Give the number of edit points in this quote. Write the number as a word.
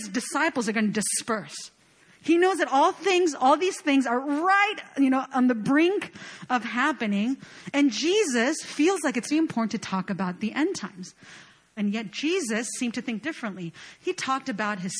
two